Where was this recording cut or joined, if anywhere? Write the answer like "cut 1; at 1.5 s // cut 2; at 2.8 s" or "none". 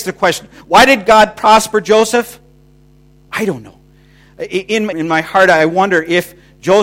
cut 1; at 3.3 s // cut 2; at 4.9 s

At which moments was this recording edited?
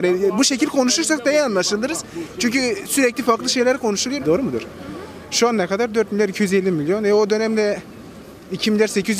cut 1; at 4.2 s

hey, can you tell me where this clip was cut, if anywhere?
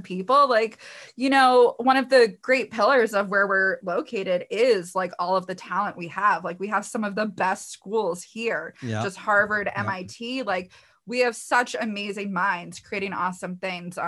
none

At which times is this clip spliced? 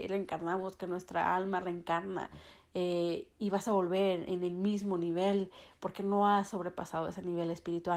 none

